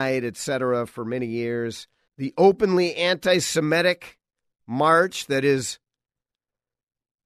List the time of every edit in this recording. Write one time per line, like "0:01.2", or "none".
0:02.1